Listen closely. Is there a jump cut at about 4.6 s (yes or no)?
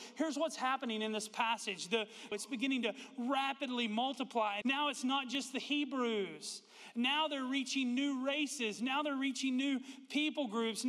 yes